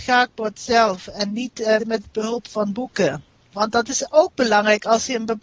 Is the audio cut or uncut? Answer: cut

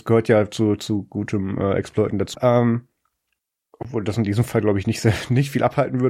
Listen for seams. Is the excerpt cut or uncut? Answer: cut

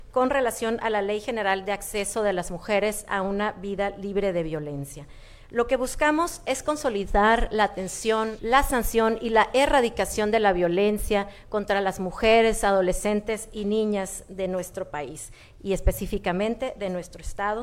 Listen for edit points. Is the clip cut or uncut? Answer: cut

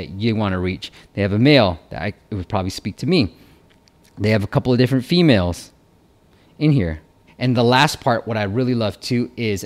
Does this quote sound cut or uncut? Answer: cut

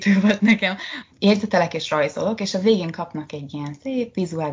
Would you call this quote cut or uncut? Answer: cut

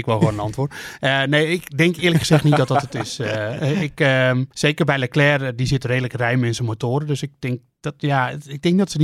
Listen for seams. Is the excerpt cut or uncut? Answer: cut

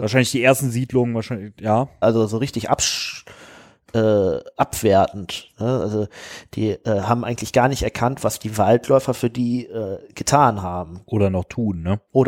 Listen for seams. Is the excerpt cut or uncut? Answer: cut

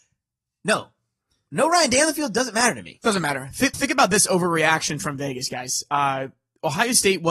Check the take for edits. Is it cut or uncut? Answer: cut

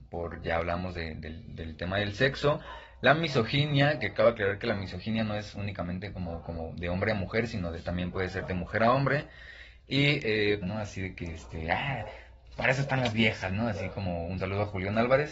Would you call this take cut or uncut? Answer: cut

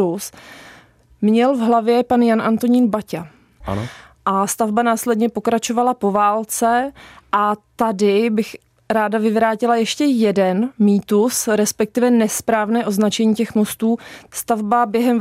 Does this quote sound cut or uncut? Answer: cut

